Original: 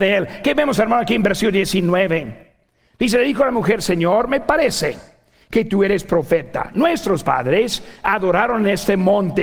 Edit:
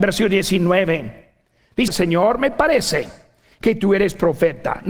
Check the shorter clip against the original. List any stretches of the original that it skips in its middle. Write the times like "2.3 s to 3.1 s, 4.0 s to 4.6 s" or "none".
3.1 s to 3.8 s